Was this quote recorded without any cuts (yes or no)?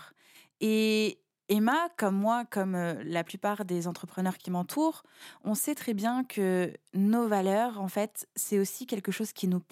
yes